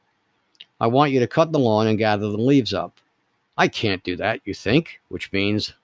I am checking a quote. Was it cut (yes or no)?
no